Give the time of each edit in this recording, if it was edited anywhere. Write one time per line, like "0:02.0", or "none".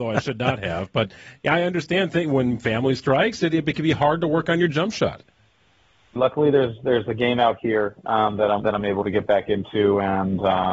0:06.2
0:08.6